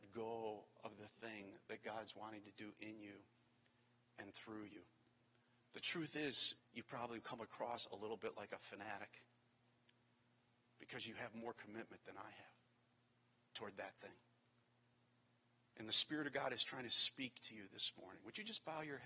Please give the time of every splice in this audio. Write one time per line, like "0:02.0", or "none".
0:06.6